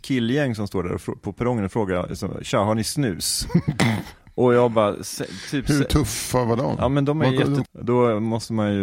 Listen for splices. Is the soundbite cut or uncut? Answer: cut